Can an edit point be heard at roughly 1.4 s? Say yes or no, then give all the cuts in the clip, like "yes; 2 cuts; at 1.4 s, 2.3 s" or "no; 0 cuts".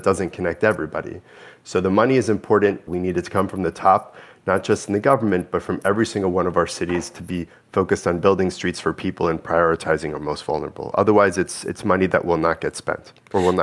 no; 1 cut; at 2.9 s